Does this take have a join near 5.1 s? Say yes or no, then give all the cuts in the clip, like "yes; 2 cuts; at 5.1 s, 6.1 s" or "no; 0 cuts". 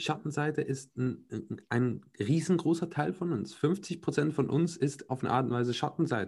yes; 1 cut; at 5.1 s